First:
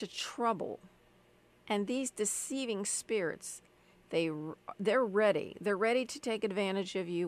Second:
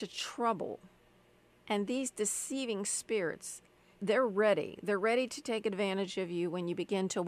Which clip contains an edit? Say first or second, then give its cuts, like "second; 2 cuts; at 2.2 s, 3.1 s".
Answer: second; 1 cut; at 4.0 s